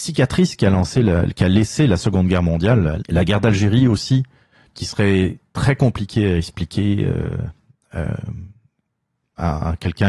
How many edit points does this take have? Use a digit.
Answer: 1